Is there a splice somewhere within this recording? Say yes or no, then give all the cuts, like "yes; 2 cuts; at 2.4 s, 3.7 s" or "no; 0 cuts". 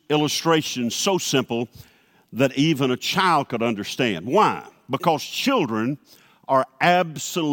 no; 0 cuts